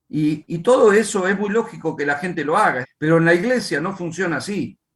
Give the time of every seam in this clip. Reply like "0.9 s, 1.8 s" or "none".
2.8 s